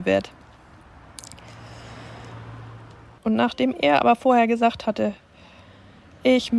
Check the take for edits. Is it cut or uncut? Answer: cut